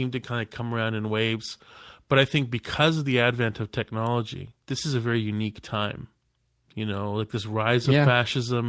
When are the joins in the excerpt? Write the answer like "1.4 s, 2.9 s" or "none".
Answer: 4.6 s